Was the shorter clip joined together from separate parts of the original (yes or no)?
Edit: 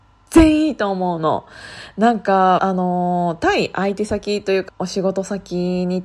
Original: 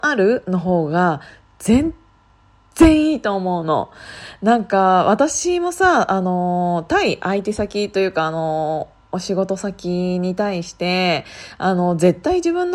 yes